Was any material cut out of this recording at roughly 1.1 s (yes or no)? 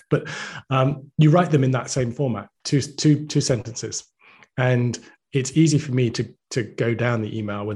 no